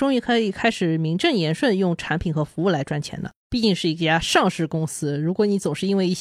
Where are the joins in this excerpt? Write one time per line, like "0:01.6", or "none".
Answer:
0:03.4